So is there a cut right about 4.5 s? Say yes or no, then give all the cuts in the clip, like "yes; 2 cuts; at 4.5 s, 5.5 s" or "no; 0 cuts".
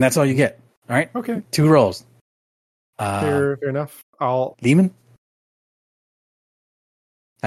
yes; 2 cuts; at 2.8 s, 4.5 s